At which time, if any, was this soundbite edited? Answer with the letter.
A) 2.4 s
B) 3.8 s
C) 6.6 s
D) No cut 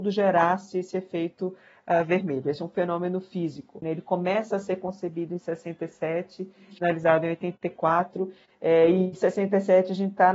B